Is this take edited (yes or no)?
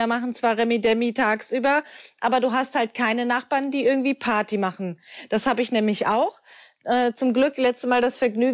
no